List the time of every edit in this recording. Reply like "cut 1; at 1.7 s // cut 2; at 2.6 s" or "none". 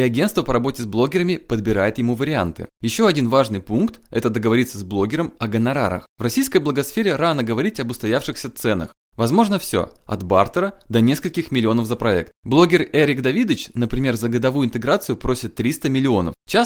cut 1; at 2.7 s